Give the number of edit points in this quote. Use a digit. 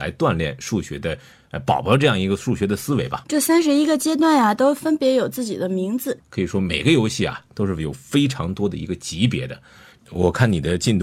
2